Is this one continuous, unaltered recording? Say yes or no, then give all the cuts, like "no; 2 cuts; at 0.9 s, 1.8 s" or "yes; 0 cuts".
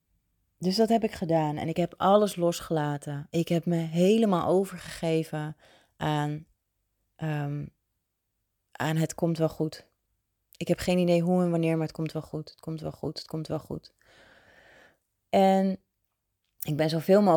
yes; 0 cuts